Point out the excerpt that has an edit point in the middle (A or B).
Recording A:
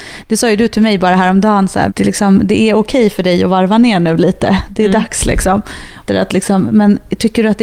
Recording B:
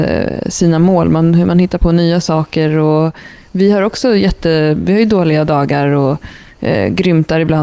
A